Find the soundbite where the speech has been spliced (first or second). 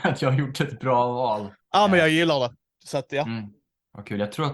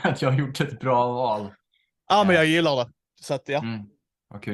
first